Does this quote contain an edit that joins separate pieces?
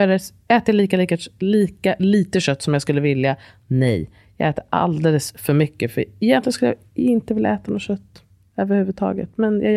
no; 0 cuts

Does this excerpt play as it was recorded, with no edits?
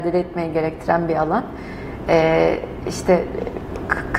yes; 0 cuts

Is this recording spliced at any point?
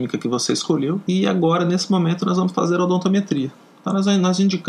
no; 0 cuts

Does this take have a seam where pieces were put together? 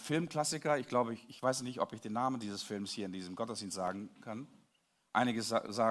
no; 0 cuts

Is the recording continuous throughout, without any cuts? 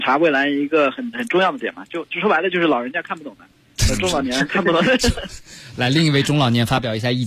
yes; 0 cuts

